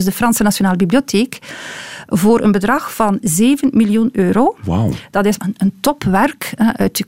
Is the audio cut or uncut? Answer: cut